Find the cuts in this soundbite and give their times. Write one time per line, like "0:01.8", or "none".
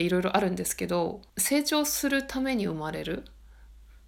0:01.3